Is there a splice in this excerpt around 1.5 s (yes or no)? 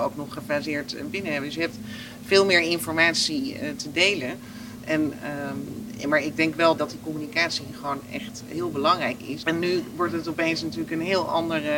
no